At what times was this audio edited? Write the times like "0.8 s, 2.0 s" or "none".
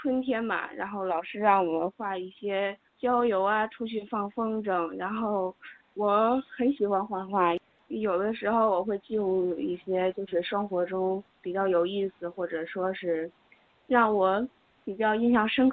none